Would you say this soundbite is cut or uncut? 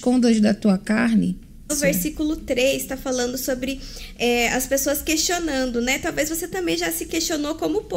cut